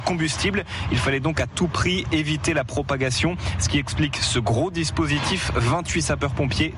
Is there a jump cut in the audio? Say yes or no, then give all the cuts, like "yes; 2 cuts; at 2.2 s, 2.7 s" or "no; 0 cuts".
no; 0 cuts